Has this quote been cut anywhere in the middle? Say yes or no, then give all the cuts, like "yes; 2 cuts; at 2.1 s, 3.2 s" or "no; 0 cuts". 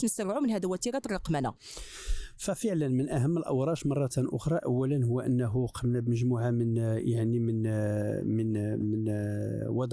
yes; 1 cut; at 8.8 s